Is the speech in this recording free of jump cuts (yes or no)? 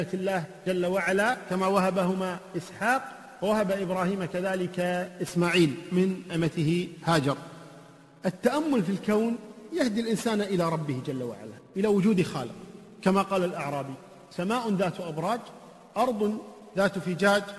yes